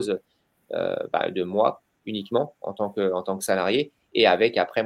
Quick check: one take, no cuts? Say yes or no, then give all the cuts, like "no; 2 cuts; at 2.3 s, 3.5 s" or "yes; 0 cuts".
yes; 0 cuts